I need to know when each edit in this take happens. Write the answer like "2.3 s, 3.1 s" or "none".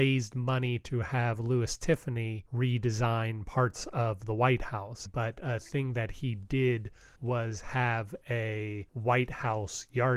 5.1 s